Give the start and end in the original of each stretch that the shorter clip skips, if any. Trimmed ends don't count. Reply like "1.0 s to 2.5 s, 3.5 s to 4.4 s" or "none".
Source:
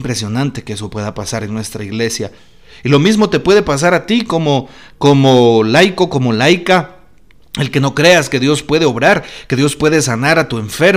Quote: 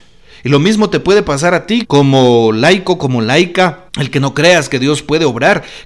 4.2 s to 4.9 s, 7.0 s to 7.5 s

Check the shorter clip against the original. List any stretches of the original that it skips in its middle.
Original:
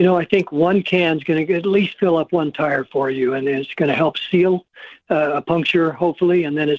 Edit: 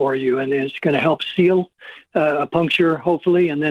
none

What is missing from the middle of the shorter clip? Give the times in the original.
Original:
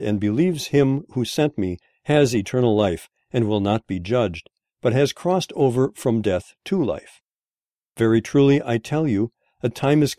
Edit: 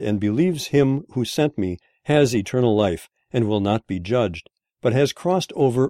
none

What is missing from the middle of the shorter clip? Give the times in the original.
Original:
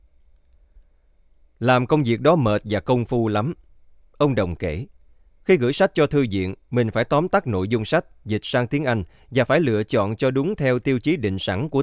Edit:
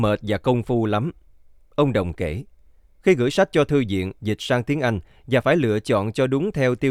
6.6 s to 8.2 s

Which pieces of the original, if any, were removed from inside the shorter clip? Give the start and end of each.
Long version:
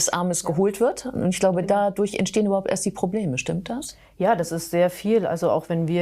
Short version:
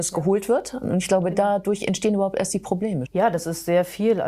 3.4 s to 4.1 s

